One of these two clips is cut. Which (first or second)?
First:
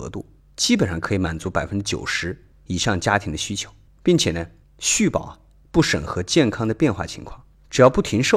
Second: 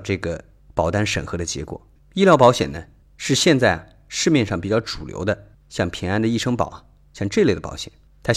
second